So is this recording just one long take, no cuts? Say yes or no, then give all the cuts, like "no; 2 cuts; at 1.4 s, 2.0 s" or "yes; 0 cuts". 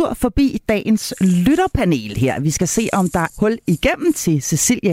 no; 1 cut; at 3.3 s